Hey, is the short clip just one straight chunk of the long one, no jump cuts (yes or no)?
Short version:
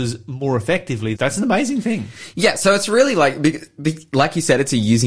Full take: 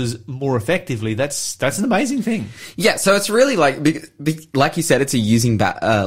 no